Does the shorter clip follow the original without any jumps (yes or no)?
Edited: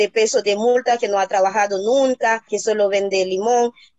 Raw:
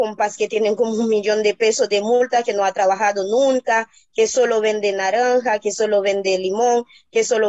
no